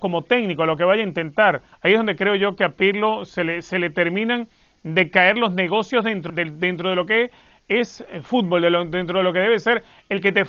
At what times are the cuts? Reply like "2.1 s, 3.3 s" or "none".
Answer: 1.7 s, 6.3 s

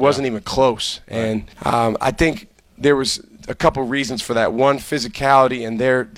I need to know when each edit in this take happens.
1.5 s

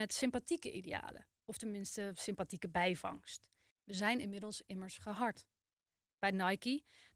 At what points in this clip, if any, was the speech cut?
3.7 s

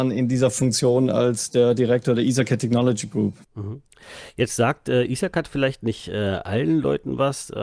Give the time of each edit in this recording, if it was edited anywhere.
3.4 s

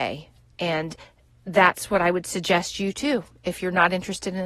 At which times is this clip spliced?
none

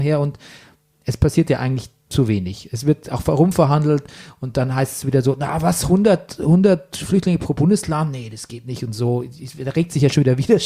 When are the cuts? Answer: none

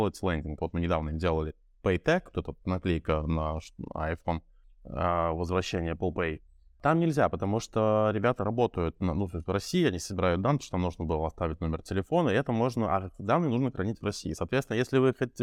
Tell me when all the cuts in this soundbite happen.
none

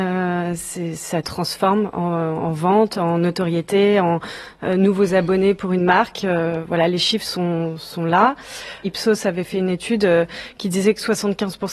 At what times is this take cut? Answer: none

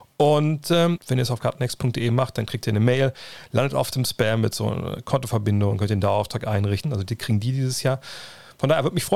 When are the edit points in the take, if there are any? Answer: 1.0 s, 6.8 s

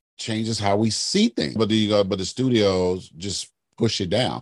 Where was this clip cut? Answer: 1.6 s

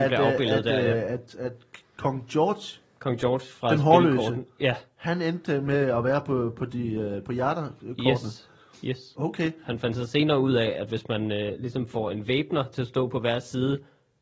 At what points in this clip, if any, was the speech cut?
9.6 s

